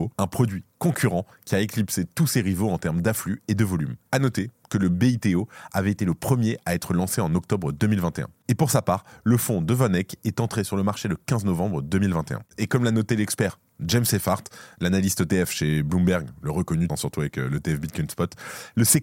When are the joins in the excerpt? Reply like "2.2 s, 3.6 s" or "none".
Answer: 16.9 s